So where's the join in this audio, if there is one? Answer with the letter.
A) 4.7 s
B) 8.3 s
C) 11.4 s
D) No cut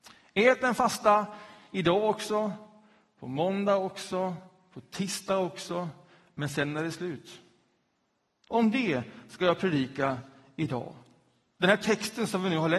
B